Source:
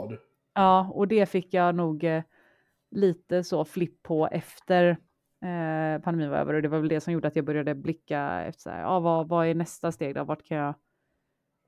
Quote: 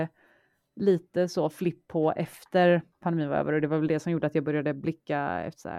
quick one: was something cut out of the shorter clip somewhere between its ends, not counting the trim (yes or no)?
yes